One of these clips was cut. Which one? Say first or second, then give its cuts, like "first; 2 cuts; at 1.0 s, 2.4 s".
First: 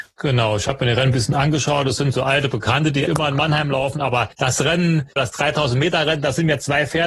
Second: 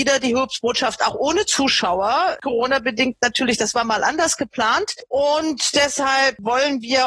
first; 2 cuts; at 3.1 s, 5.2 s